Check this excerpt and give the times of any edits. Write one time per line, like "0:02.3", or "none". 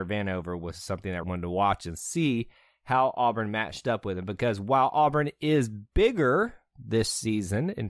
0:01.2